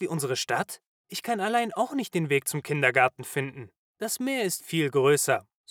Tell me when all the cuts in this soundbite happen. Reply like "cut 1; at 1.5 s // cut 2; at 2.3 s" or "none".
cut 1; at 4.6 s